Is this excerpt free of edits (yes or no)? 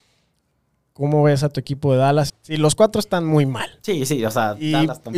no